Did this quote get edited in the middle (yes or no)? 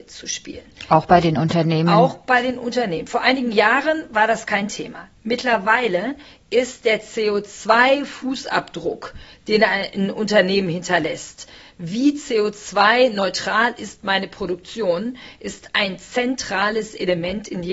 no